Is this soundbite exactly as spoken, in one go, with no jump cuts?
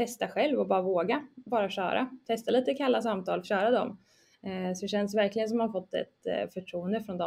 no; 1 cut; at 3.4 s

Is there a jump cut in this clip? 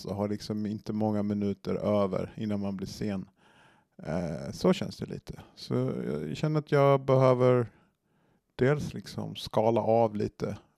no; 0 cuts

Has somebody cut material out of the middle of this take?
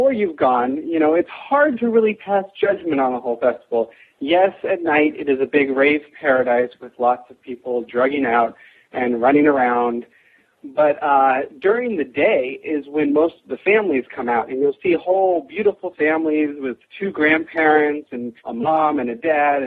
yes; 1 cut; at 18.4 s

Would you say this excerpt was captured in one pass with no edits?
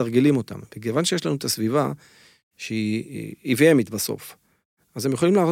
yes; 0 cuts

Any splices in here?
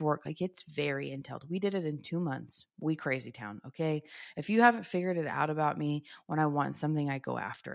yes; 1 cut; at 2.7 s

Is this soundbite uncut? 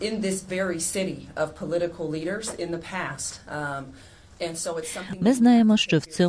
yes; 0 cuts

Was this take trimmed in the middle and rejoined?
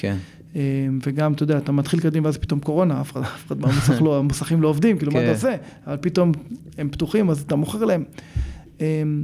no; 0 cuts

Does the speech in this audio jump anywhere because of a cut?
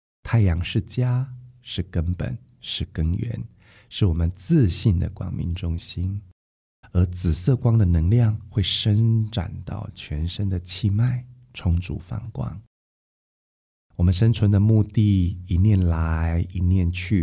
yes; 1 cut; at 6.8 s

